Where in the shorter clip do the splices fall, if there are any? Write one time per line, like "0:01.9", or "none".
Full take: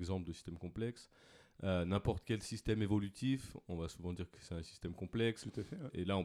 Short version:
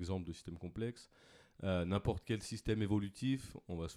none